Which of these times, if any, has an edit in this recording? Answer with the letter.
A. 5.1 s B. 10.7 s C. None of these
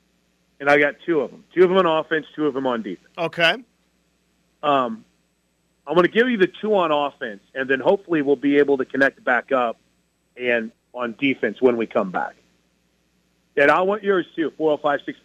B